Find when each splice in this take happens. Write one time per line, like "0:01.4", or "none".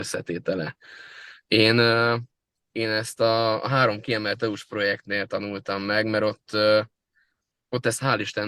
none